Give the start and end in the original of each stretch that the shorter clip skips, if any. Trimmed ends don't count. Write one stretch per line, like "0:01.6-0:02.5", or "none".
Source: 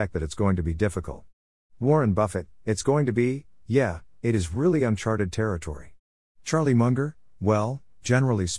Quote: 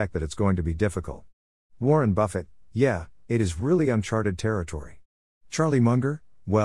0:02.6-0:03.6

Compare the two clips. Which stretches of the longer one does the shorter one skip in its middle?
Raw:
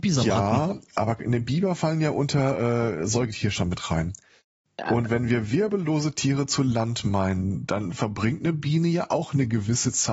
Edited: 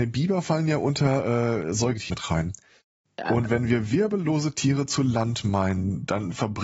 0:03.4-0:03.7

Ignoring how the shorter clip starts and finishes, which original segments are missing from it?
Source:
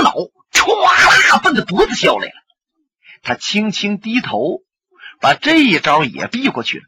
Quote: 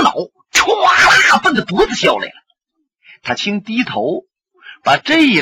0:03.4-0:03.7

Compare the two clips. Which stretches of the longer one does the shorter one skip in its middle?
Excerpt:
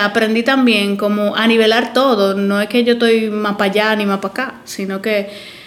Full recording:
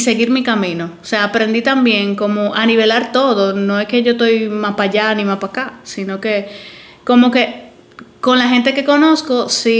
none

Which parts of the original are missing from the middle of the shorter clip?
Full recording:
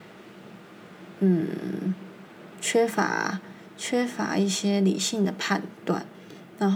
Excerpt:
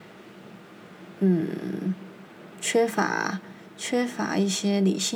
none

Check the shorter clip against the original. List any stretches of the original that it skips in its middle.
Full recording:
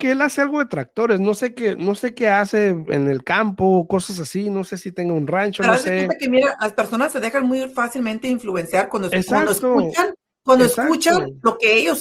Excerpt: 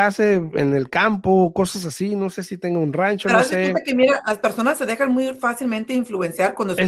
none

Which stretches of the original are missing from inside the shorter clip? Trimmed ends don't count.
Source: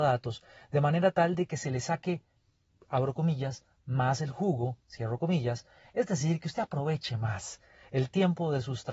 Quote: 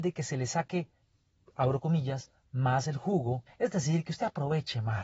0:04.8-0:05.8

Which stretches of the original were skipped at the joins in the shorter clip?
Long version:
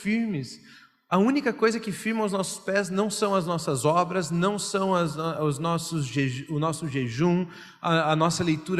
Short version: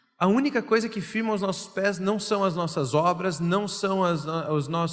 none

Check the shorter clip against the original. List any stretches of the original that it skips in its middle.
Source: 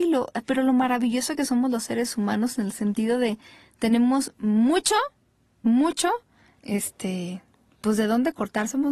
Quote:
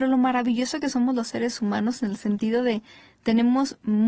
none

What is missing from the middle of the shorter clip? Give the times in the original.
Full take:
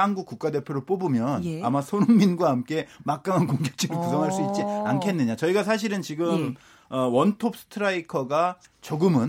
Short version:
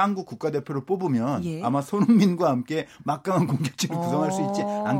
none

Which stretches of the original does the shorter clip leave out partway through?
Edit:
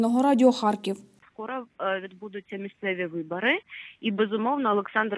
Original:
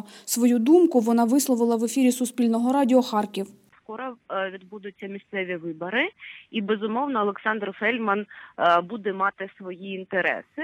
none

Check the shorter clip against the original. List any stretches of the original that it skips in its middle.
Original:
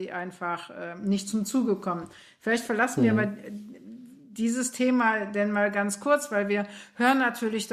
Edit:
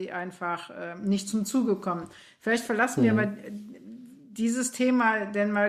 none

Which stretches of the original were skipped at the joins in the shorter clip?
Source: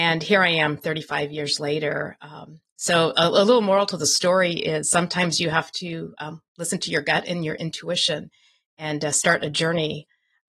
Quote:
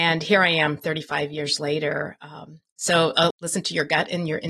0:03.3-0:06.5

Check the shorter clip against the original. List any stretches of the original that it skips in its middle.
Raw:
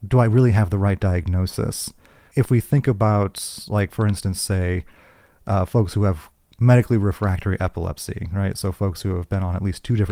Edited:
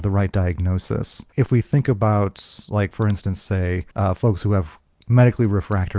0:02.0-0:02.3
0:04.9-0:05.4

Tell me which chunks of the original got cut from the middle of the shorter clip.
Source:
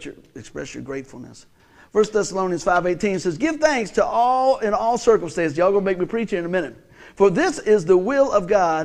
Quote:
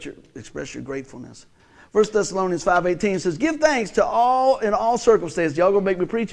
none

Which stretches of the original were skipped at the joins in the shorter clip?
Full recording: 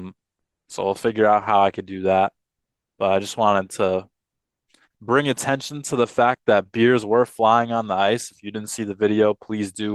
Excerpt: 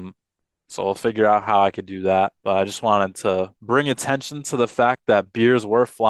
0:02.4-0:02.9
0:04.1-0:05.0

